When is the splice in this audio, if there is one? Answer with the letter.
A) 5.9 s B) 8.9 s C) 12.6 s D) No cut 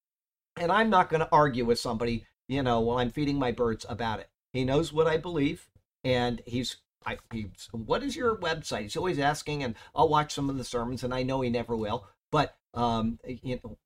D